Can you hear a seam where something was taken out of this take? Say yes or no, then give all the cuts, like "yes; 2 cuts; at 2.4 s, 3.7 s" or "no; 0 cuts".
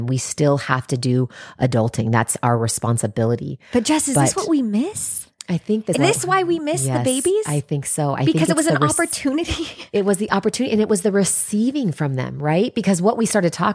yes; 1 cut; at 5.9 s